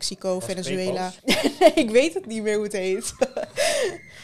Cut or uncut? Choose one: cut